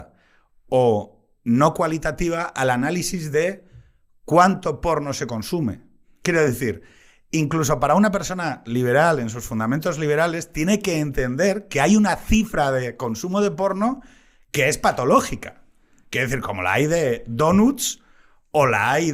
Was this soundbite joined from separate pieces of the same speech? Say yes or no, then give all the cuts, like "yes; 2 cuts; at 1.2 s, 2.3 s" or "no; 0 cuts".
no; 0 cuts